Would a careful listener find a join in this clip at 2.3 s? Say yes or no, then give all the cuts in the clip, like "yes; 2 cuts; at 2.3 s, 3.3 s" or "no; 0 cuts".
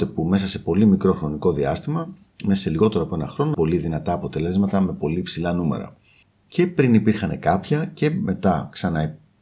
no; 1 cut; at 3.5 s